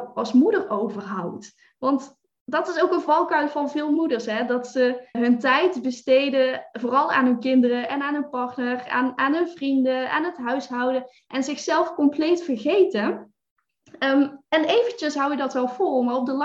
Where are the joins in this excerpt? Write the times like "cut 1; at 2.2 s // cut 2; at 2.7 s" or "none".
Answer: cut 1; at 5.1 s